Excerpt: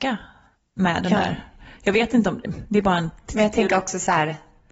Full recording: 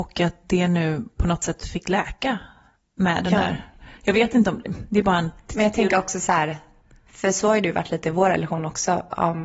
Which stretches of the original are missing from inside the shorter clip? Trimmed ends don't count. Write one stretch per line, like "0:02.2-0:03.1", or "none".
none